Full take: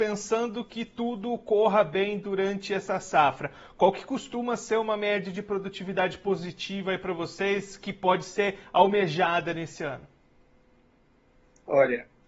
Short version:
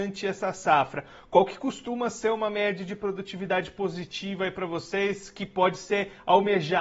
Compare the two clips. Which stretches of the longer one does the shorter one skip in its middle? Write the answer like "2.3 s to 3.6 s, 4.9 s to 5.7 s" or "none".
none